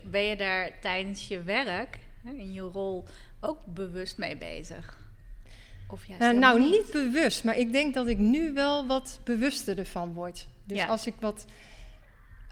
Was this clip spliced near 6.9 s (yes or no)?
no